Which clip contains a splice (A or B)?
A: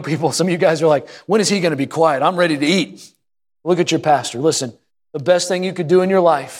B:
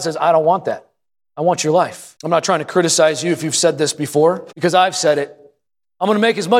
B